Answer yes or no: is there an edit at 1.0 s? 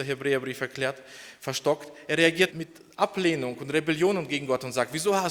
no